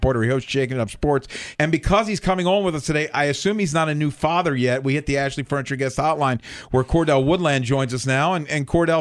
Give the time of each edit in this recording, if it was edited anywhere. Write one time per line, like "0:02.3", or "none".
0:01.6